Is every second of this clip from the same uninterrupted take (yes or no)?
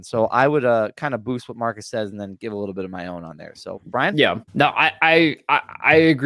no